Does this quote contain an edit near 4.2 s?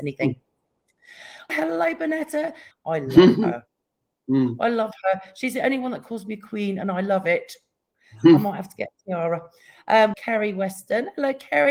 no; 3 cuts; at 1.5 s, 2.7 s, 10.1 s

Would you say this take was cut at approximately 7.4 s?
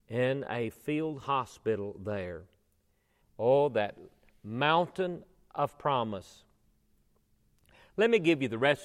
no; 1 cut; at 3.2 s

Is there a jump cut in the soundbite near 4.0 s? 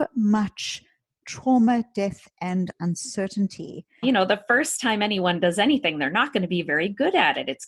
yes; 1 cut; at 4.0 s

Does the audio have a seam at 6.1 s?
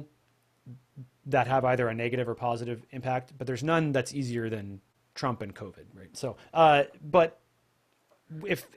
yes; 1 cut; at 6.1 s

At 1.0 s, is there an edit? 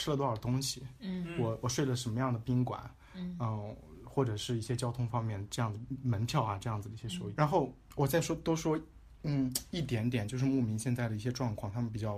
no; 1 cut; at 7.4 s

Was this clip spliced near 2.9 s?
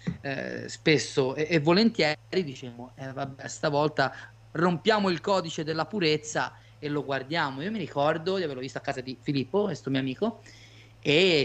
no; 0 cuts

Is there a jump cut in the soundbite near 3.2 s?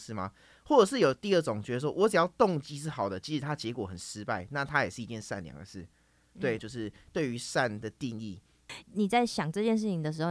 no; 2 cuts; at 6.6 s, 8.8 s

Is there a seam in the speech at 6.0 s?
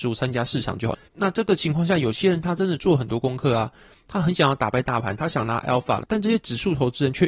no; 1 cut; at 1.1 s

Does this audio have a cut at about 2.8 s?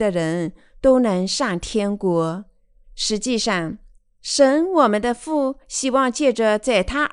yes; 1 cut; at 2.8 s

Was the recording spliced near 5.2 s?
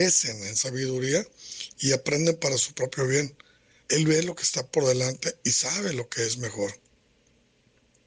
no; 1 cut; at 3.8 s

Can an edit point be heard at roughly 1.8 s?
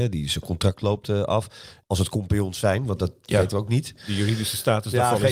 yes; 1 cut; at 1.8 s

